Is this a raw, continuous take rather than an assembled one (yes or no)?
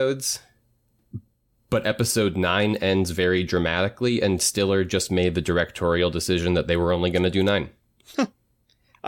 yes